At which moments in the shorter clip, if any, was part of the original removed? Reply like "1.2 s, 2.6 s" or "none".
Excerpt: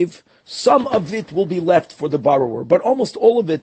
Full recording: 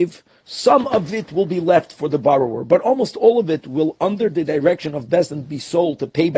none